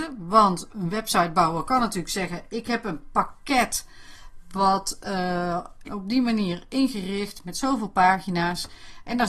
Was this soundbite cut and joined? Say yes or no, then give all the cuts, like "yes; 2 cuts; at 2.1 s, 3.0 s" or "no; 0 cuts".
yes; 1 cut; at 5.8 s